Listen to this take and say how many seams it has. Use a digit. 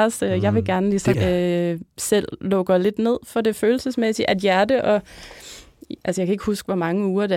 1